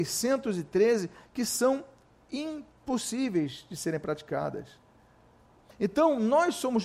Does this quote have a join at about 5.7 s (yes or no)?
yes